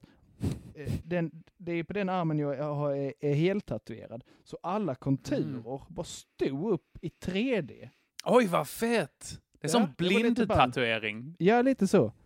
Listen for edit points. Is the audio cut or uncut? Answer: cut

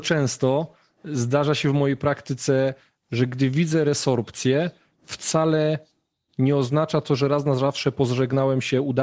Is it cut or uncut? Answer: uncut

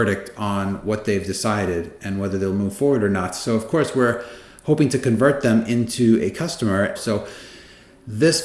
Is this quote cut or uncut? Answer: cut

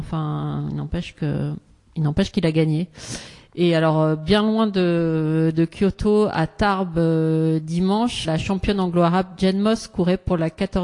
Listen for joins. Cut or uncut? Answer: cut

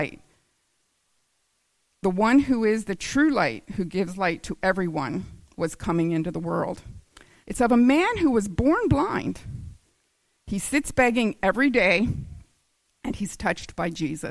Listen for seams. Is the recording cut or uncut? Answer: cut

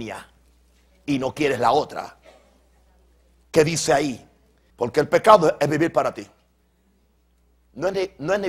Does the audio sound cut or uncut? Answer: cut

